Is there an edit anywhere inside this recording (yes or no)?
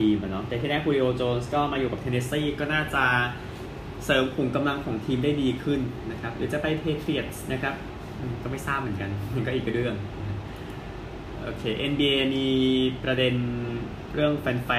no